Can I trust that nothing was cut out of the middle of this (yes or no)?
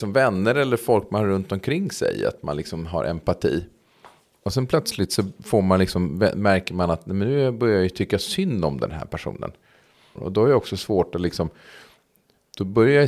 no